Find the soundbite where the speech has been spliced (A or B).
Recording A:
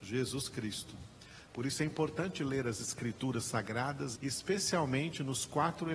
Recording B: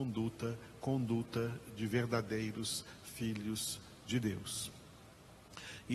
A